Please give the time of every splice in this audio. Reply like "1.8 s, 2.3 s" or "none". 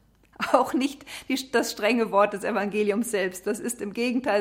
none